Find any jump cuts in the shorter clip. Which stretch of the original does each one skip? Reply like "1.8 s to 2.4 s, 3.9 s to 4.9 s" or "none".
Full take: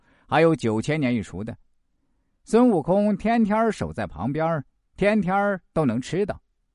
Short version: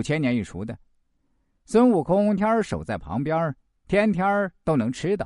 3.2 s to 3.5 s